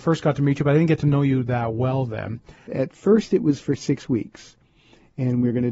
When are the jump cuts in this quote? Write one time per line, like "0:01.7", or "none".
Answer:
0:02.7